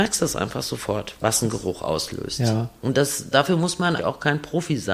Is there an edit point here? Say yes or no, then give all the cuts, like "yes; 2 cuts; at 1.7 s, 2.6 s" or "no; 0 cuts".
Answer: yes; 2 cuts; at 1.2 s, 4.0 s